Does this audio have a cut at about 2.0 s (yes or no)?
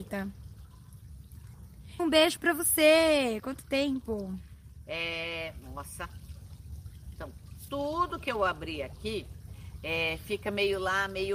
yes